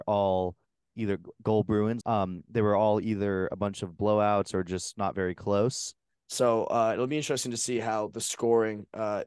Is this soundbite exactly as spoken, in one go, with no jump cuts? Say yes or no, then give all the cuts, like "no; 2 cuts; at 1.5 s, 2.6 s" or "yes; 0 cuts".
no; 2 cuts; at 2.0 s, 6.1 s